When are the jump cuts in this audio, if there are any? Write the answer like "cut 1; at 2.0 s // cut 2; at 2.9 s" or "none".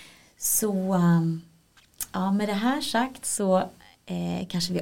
none